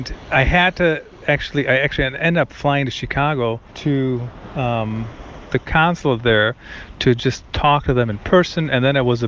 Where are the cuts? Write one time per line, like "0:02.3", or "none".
0:03.7